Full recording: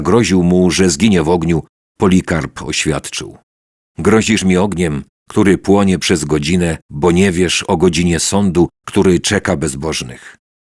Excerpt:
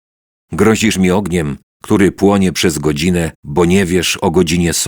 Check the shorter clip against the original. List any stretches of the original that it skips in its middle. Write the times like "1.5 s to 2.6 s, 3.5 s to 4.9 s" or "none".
none